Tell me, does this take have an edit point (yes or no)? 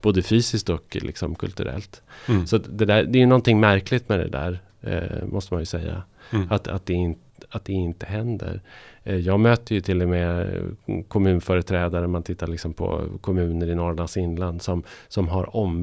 no